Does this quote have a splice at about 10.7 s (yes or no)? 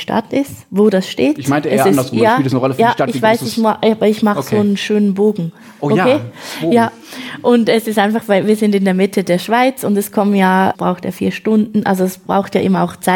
yes